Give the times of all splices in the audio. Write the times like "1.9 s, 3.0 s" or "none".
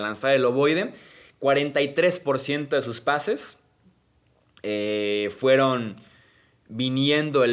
none